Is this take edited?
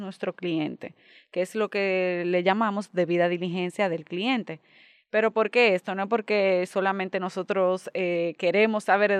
no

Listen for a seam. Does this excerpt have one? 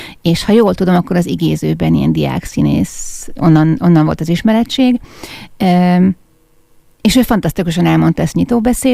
no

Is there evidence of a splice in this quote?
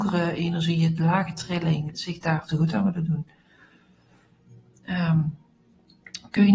yes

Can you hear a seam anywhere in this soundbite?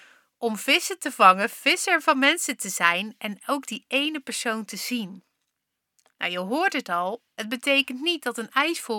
no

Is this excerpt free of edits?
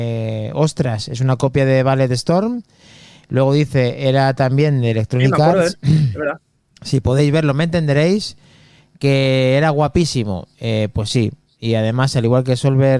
yes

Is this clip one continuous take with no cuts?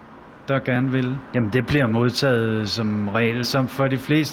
no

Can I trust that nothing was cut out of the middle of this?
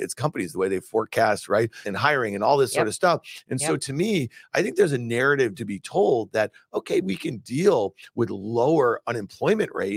no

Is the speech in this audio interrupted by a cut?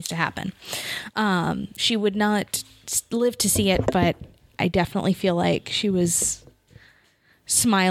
yes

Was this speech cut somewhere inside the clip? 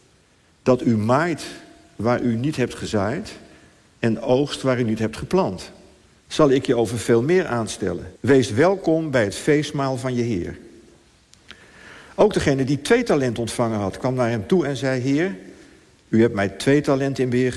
yes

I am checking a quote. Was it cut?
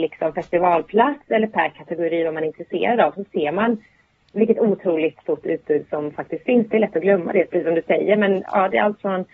no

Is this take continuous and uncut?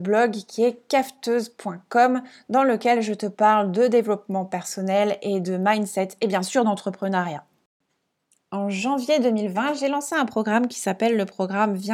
yes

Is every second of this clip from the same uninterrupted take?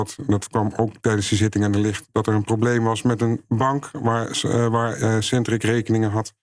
yes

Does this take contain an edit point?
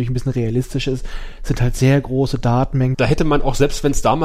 yes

